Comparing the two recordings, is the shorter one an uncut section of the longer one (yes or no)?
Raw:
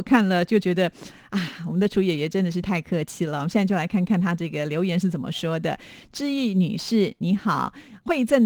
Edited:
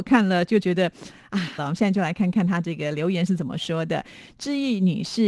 no